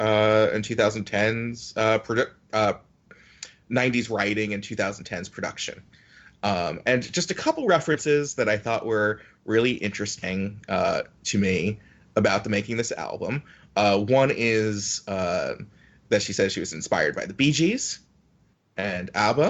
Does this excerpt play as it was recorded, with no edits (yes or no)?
yes